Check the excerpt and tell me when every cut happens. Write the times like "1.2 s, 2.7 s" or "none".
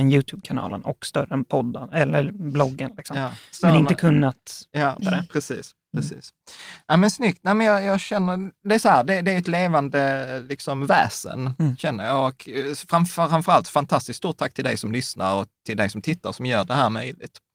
5.0 s